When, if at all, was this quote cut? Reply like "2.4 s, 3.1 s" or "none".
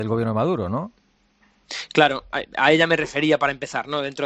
none